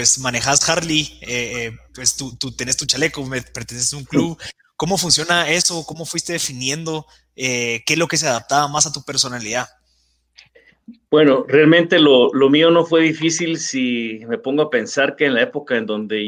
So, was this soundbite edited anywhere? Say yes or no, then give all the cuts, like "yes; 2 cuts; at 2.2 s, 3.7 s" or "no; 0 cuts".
no; 0 cuts